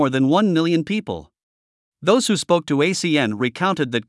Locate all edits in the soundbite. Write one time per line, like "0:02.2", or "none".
0:01.9